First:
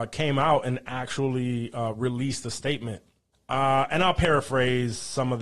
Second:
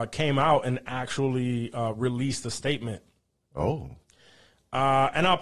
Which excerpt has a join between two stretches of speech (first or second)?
first